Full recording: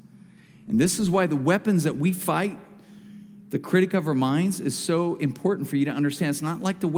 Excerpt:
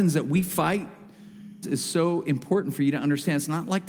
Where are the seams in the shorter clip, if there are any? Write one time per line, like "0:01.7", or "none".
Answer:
0:01.6